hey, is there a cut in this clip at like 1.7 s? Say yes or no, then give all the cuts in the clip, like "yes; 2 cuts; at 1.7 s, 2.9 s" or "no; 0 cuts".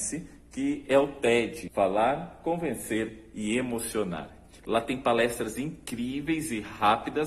no; 1 cut; at 4.6 s